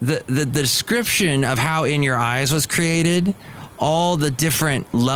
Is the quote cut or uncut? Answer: uncut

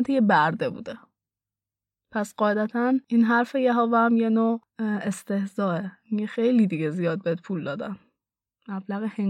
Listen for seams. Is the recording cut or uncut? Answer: uncut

